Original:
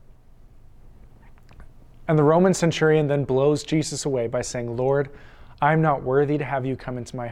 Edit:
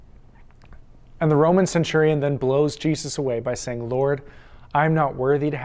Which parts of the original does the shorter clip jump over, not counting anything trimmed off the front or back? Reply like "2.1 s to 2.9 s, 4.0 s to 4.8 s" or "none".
none